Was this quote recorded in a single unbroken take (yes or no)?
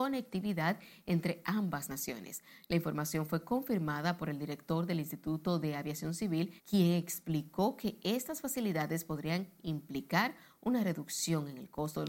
no